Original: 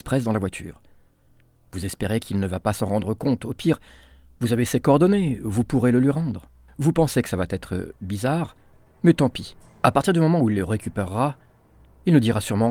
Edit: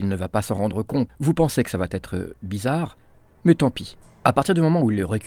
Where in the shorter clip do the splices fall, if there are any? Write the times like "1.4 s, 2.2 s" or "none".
1.1 s